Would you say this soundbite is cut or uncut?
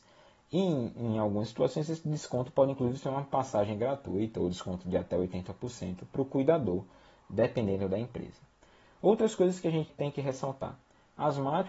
cut